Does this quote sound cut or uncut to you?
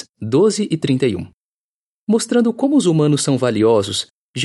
uncut